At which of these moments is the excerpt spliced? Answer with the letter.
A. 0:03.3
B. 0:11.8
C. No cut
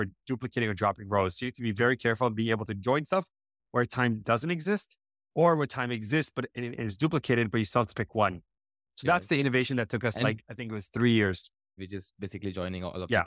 B